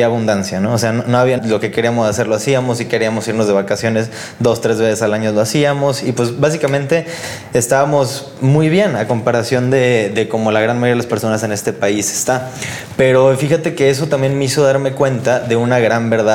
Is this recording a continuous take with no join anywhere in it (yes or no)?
no